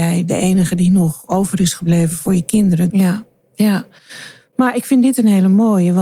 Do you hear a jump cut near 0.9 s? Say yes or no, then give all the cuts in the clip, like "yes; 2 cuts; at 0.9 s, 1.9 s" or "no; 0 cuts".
no; 1 cut; at 2.9 s